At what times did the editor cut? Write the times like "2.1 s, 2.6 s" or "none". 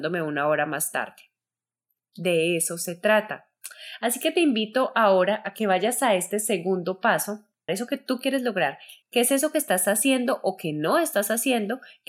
7.7 s, 9.0 s